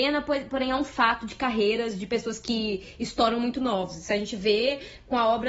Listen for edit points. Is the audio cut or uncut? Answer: uncut